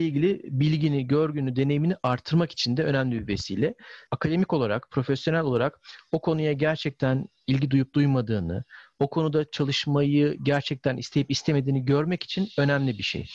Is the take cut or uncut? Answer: cut